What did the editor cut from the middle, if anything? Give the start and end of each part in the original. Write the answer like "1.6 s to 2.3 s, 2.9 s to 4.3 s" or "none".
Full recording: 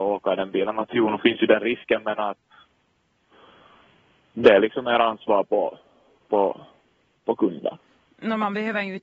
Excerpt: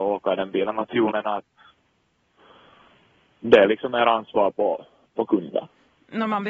1.1 s to 2.0 s, 6.0 s to 7.1 s